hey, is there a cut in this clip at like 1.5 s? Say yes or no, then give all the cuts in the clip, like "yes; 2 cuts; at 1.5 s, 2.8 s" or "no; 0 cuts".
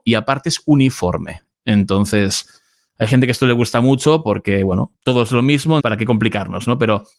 yes; 2 cuts; at 1.5 s, 5.8 s